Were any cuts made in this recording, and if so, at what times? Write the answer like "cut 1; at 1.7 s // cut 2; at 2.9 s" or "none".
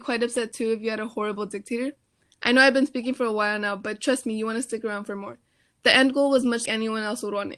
cut 1; at 6.7 s